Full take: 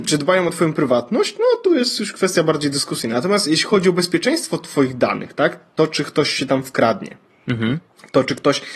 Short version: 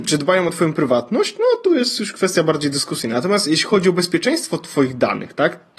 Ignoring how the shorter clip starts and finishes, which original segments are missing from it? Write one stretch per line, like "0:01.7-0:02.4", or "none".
none